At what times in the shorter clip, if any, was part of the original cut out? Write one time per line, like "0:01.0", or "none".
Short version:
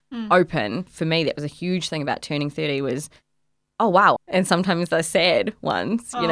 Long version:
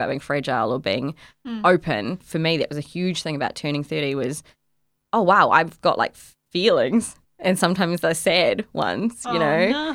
0:04.2